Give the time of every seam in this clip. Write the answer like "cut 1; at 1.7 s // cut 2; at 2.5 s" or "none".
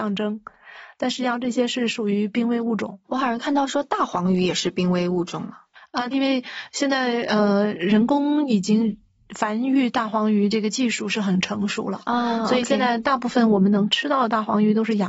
cut 1; at 3.0 s // cut 2; at 6.1 s